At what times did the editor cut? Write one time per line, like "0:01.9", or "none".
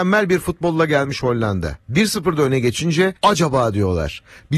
0:03.2